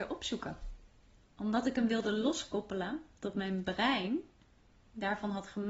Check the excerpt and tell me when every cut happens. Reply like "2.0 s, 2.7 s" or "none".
none